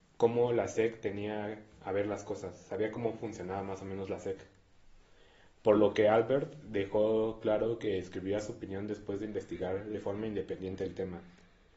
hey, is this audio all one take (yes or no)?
yes